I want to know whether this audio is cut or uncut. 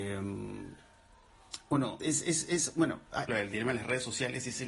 cut